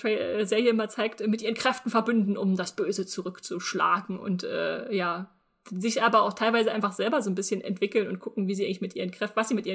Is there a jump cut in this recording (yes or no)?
no